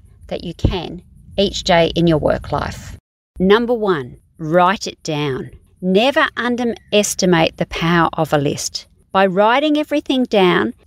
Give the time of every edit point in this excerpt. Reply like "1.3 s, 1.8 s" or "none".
none

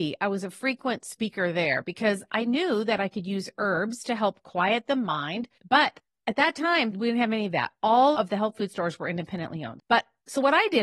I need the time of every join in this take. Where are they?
5.6 s, 9.8 s

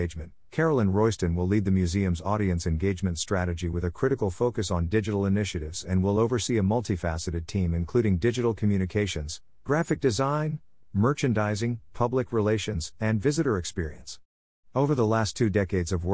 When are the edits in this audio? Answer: 10.8 s

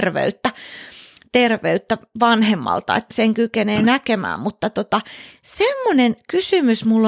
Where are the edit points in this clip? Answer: 3.1 s

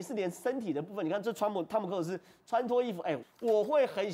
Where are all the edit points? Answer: 3.2 s

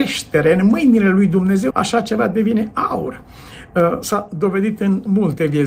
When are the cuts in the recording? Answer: 1.7 s

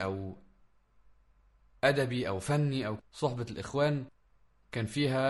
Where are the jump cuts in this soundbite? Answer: 3.0 s

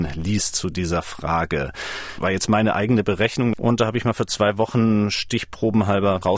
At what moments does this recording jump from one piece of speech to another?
2.2 s, 3.5 s

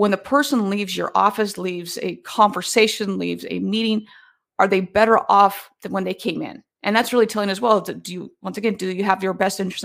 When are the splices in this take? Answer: 6.7 s

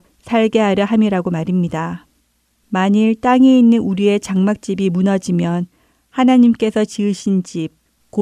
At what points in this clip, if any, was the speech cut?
2.6 s

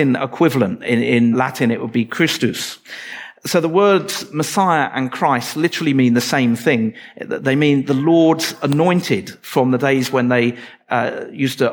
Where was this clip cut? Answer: 1.3 s

